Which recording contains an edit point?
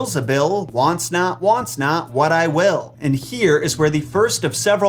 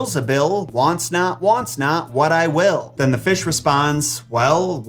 first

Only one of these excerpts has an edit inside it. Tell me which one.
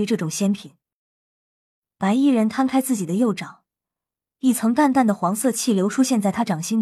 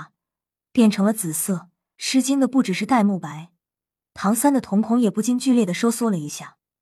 second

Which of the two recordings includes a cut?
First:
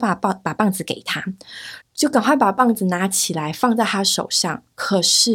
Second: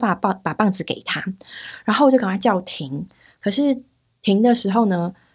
first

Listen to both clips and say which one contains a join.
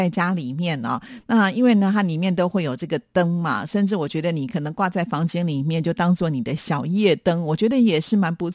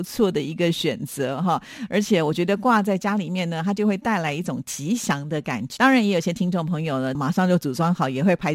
second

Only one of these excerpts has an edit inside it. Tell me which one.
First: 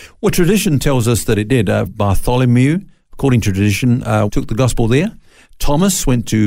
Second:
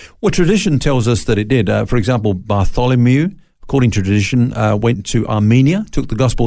first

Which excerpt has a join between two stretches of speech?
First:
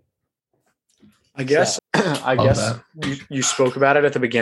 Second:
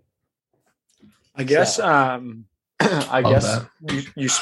first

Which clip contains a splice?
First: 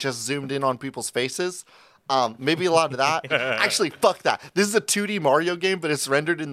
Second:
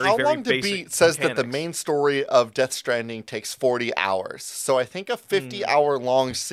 first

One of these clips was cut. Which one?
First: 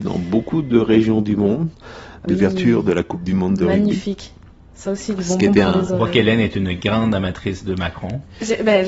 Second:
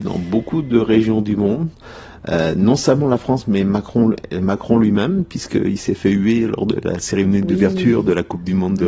first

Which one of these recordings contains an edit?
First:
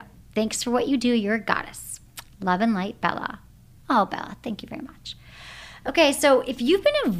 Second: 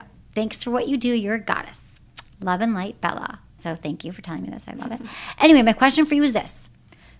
second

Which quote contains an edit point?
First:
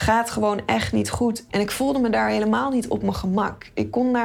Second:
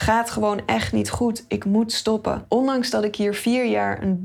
first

